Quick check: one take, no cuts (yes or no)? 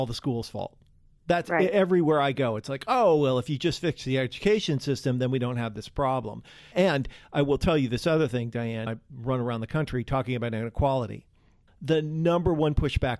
no